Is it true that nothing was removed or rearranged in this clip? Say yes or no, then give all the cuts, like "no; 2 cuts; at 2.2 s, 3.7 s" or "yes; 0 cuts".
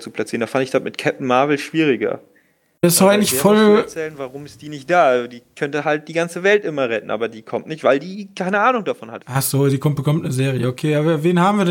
no; 1 cut; at 9.2 s